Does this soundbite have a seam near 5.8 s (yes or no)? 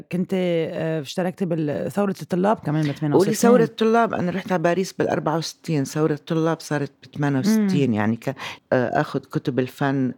no